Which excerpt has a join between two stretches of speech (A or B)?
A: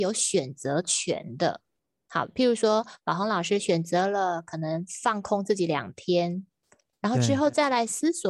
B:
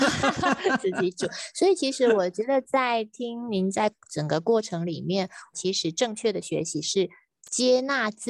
B